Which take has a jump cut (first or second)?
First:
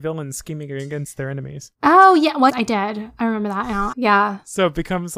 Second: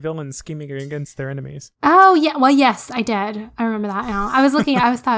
first